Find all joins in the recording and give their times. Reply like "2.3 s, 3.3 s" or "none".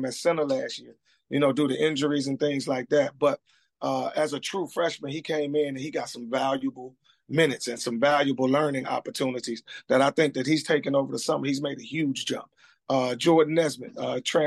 none

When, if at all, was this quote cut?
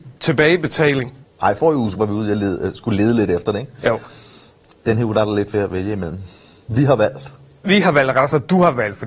1.2 s, 7.6 s

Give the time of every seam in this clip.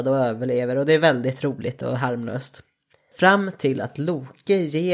none

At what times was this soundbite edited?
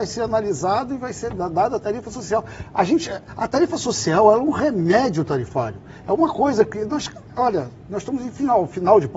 7.3 s

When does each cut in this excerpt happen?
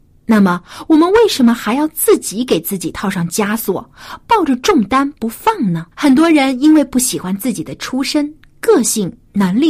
5.9 s

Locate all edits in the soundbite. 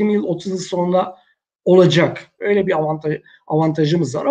2.4 s

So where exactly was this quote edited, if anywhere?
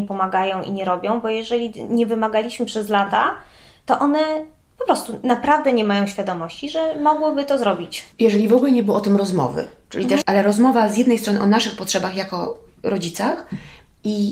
10.2 s

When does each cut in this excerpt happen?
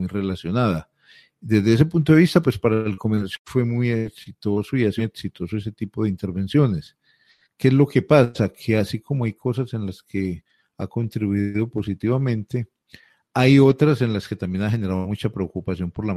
5.0 s

